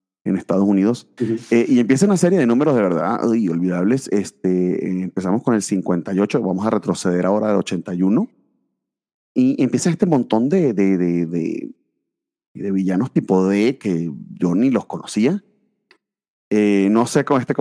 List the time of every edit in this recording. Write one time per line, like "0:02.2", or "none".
none